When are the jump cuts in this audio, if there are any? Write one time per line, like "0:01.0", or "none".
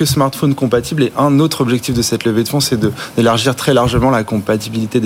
none